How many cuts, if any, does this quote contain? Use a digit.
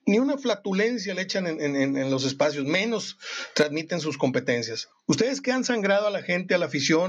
1